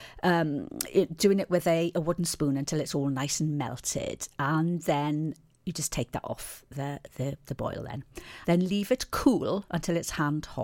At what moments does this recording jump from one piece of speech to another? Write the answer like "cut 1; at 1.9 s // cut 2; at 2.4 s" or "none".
cut 1; at 8.4 s